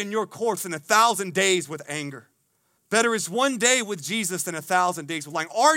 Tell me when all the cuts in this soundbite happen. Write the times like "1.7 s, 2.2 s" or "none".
2.7 s